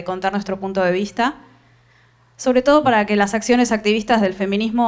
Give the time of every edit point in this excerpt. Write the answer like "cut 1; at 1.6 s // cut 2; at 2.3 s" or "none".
none